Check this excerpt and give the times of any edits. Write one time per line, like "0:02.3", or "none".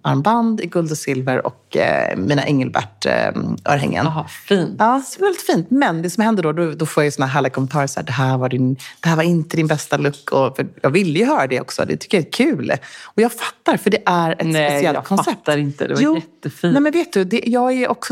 none

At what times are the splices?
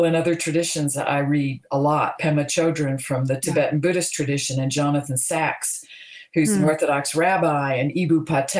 0:02.2

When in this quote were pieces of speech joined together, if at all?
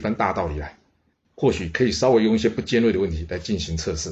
0:01.2

